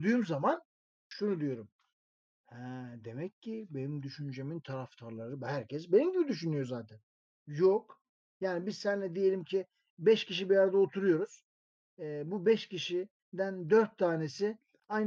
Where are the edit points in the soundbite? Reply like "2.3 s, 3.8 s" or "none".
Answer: 7.4 s